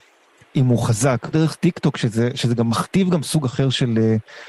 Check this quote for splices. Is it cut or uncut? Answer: cut